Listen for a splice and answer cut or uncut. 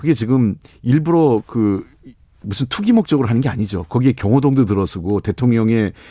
cut